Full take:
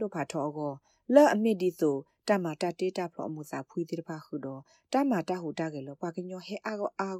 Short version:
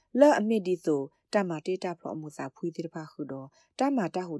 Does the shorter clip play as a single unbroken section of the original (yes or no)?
no